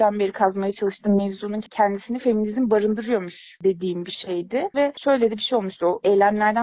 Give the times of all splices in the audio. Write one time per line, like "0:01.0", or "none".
none